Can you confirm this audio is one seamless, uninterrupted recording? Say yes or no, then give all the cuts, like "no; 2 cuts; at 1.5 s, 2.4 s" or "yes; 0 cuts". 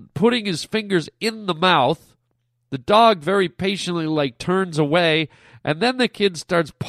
yes; 0 cuts